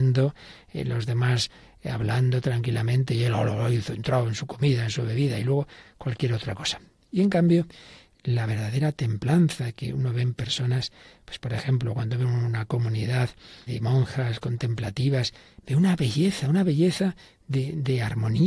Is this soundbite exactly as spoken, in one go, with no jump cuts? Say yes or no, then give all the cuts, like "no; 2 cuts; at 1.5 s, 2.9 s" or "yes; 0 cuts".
no; 1 cut; at 13.7 s